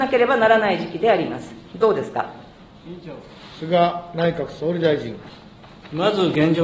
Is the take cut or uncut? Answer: uncut